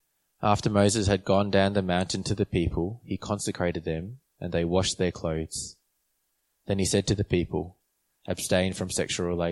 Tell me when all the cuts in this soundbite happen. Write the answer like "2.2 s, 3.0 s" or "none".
8.2 s